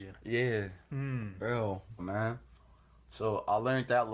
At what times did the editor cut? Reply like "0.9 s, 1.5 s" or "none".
2.0 s